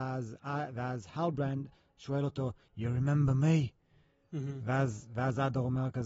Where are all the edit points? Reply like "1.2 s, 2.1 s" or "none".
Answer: none